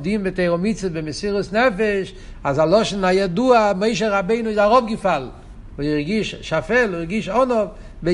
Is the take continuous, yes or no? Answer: no